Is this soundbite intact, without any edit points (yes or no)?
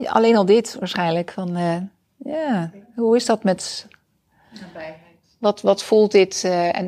yes